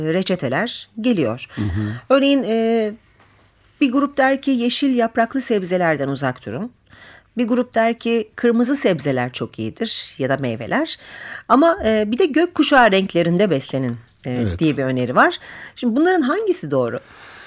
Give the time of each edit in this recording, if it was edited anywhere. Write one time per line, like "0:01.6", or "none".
none